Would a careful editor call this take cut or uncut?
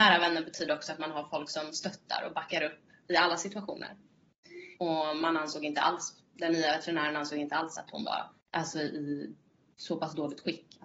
cut